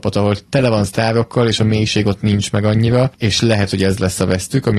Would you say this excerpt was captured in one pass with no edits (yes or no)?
no